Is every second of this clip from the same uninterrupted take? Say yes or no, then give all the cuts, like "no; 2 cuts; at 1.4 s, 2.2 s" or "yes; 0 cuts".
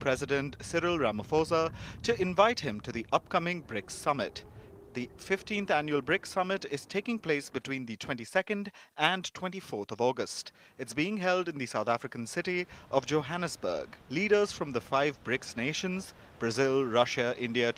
no; 1 cut; at 14.0 s